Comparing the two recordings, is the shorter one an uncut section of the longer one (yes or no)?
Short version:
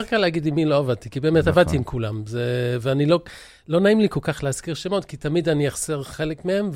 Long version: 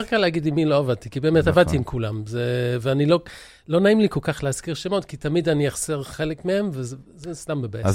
yes